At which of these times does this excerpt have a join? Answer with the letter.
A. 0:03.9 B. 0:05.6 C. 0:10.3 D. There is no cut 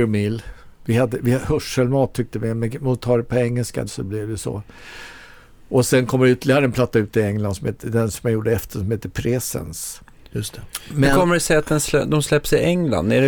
A